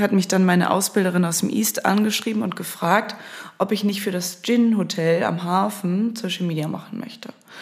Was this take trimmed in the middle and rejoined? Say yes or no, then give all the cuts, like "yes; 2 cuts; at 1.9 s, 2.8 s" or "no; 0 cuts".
no; 0 cuts